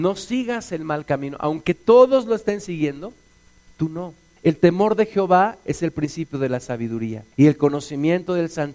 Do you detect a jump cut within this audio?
yes; 2 cuts; at 4.4 s, 7.3 s

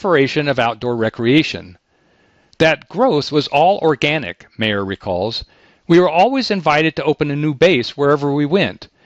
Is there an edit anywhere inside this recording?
no; 0 cuts

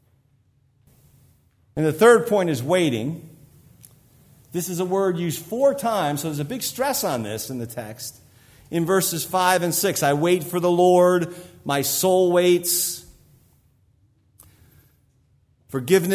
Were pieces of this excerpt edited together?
no; 0 cuts

